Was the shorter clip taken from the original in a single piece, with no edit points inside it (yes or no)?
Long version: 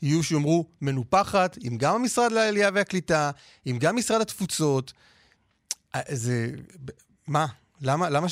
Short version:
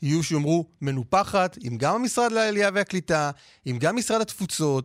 yes